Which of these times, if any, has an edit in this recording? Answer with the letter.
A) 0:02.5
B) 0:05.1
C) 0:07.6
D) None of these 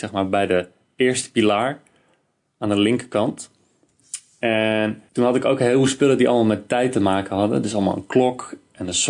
B